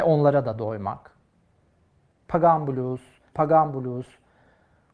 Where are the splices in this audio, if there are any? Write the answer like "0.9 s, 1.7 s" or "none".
3.3 s